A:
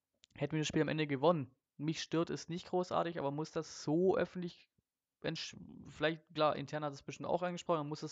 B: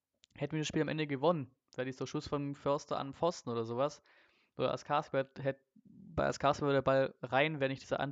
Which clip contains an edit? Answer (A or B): A